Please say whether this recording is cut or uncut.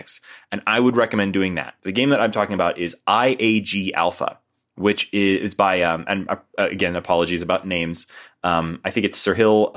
uncut